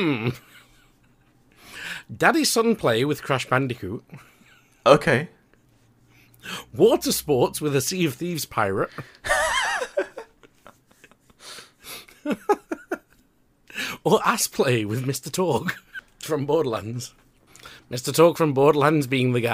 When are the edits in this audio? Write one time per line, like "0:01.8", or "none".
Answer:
none